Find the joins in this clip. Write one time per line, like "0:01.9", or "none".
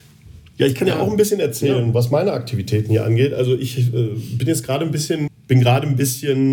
0:05.3